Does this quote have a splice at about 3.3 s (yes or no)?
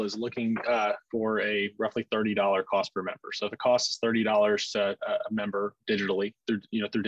no